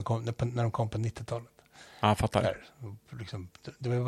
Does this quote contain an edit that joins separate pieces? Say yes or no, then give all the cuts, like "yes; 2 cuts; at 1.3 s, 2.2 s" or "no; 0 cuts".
no; 0 cuts